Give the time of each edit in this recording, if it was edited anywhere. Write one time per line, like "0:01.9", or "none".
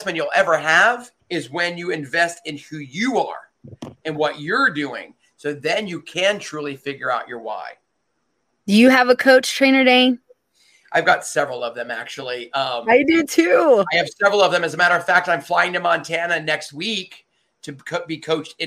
0:01.2